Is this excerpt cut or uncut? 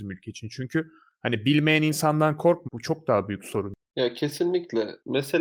cut